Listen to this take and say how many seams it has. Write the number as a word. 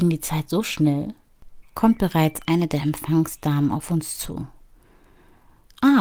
one